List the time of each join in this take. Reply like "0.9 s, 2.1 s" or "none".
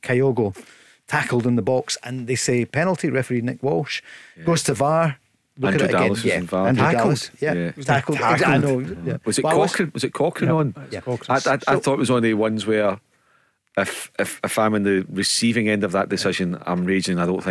none

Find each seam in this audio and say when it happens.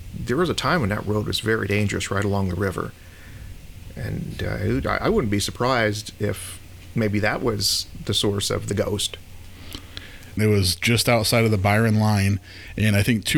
10.4 s

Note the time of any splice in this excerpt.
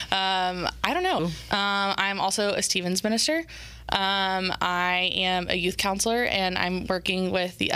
1.2 s

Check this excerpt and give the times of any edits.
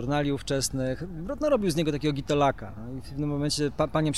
none

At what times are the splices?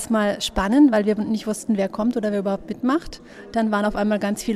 none

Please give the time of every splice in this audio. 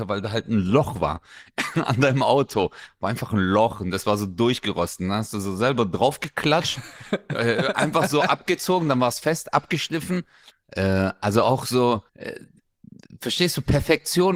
10.5 s, 12.1 s

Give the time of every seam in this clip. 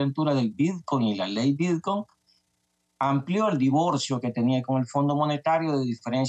none

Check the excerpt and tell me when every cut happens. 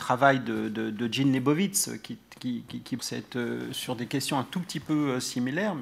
3.0 s

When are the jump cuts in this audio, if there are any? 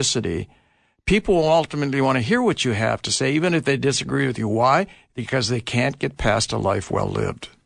none

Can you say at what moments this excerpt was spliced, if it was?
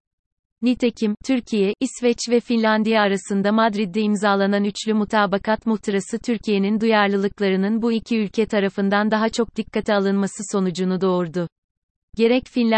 none

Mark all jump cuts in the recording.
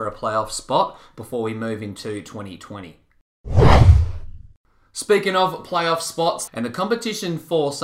6.5 s

